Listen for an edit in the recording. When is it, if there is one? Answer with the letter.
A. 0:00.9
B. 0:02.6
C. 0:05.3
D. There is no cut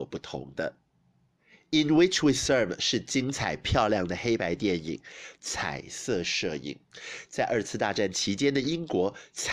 C